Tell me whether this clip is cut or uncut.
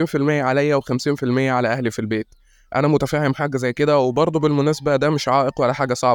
uncut